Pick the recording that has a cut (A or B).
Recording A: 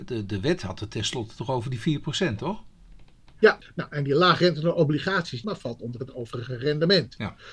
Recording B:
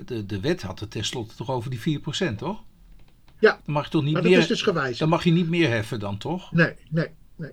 A